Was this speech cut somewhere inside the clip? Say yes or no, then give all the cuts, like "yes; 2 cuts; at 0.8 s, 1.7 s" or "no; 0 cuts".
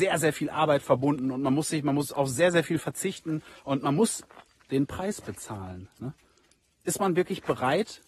no; 0 cuts